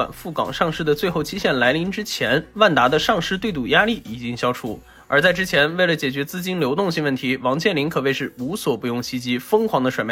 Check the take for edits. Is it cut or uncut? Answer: uncut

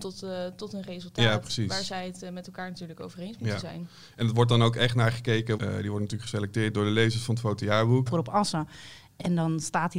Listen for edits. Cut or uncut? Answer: cut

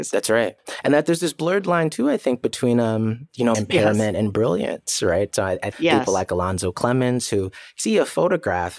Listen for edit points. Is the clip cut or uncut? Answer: cut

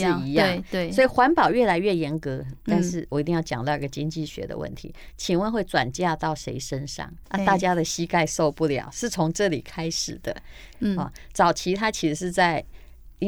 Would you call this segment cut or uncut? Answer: cut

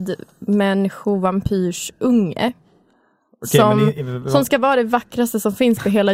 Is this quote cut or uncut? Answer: uncut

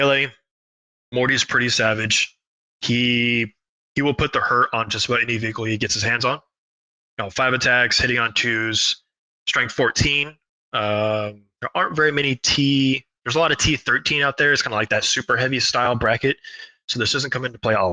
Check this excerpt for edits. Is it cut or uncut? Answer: uncut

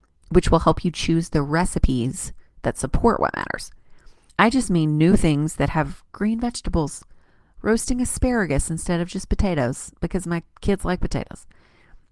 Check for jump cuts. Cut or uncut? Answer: cut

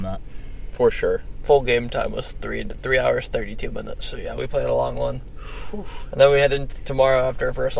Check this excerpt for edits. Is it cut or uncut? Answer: uncut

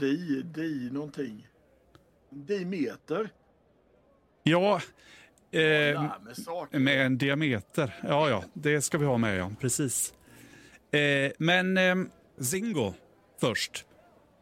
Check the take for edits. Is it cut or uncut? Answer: cut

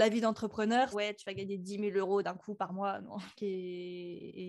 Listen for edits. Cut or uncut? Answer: cut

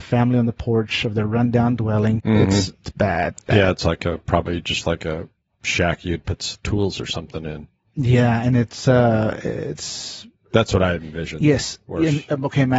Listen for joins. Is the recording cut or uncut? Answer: cut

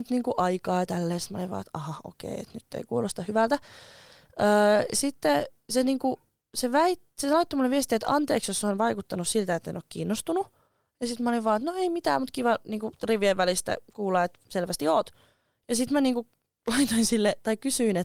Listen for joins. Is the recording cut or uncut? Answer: uncut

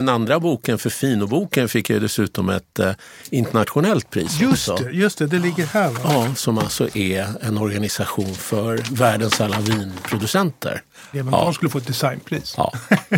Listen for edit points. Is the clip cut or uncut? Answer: cut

